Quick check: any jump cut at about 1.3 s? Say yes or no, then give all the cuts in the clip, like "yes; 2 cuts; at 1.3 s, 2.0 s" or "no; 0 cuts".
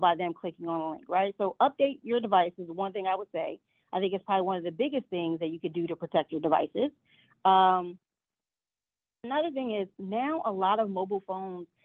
no; 0 cuts